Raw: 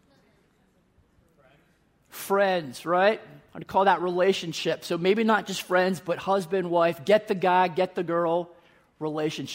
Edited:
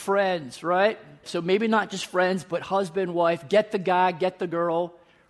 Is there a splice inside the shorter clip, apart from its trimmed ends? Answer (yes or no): yes